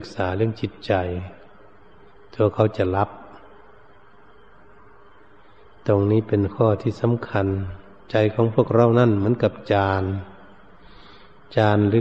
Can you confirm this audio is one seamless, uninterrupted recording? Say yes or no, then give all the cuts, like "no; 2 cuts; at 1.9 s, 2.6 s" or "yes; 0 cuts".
yes; 0 cuts